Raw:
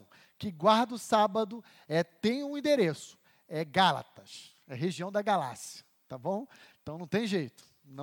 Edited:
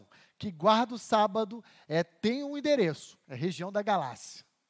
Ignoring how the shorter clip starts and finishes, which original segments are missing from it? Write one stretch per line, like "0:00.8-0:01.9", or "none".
0:03.2-0:04.6